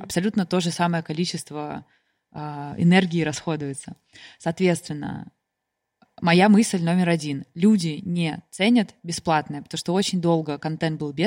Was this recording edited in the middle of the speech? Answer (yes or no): no